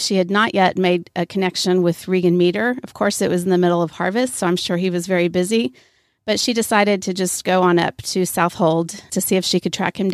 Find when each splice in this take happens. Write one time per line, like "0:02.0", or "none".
0:09.1